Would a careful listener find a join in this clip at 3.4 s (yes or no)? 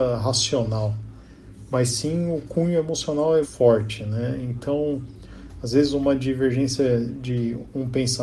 yes